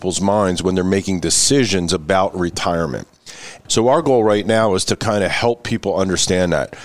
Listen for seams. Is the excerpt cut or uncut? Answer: cut